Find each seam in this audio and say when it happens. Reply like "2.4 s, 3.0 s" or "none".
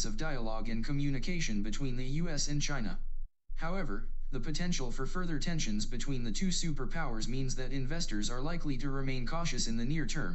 3.4 s